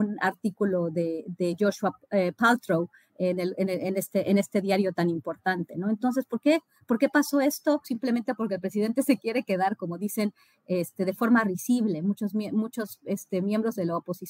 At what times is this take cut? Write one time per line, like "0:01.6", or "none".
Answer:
0:07.8